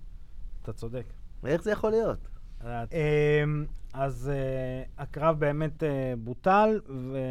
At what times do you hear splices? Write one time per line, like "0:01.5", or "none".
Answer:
0:02.9